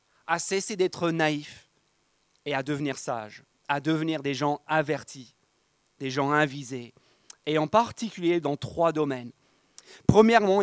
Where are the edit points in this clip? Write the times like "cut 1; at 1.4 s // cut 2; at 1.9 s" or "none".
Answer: none